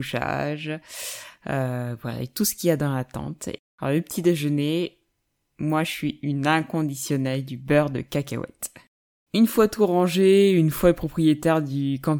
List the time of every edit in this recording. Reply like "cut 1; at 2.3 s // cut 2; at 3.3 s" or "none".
cut 1; at 3.6 s // cut 2; at 9.3 s